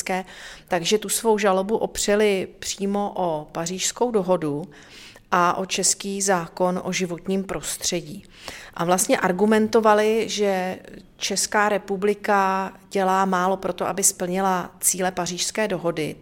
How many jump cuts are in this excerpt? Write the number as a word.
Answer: zero